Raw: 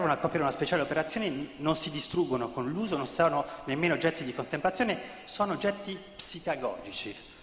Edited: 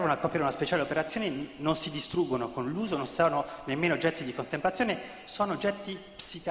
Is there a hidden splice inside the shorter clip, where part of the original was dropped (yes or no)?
no